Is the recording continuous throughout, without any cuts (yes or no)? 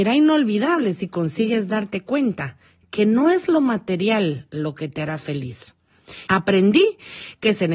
no